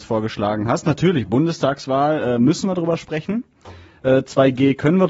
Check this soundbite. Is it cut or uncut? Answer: uncut